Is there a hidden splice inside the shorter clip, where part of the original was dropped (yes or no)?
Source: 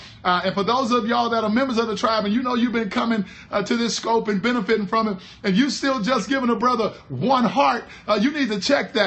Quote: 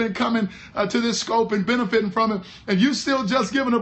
no